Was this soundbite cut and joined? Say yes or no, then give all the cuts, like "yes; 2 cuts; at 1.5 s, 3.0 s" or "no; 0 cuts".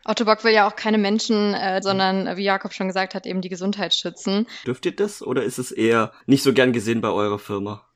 yes; 3 cuts; at 1.8 s, 4.6 s, 6.2 s